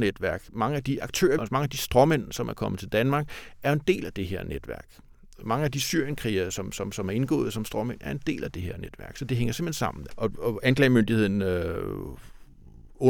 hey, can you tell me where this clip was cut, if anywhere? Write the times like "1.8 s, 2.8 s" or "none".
1.4 s, 10.1 s